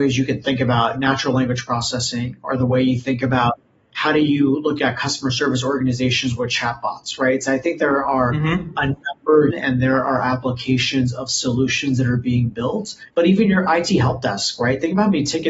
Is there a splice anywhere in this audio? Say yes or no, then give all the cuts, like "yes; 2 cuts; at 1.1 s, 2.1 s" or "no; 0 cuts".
yes; 2 cuts; at 9.5 s, 13.1 s